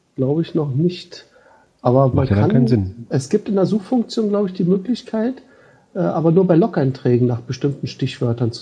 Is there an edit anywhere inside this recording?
no; 0 cuts

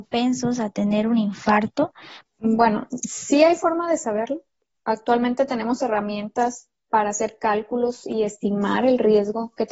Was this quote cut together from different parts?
yes; 1 cut; at 2.3 s

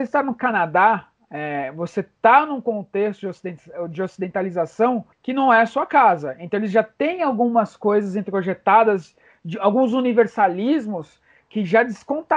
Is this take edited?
yes; 1 cut; at 5.1 s

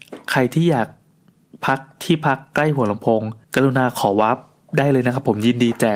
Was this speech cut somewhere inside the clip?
yes; 1 cut; at 3.4 s

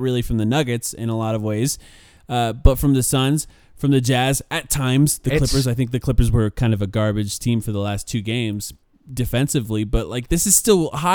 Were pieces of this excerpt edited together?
no; 0 cuts

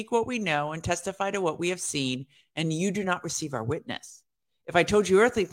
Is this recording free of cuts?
yes; 0 cuts

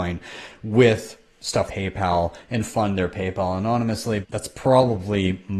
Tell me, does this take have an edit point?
yes; 2 cuts; at 1.7 s, 4.2 s

